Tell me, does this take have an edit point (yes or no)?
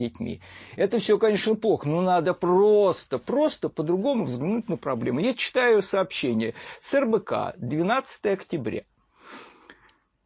no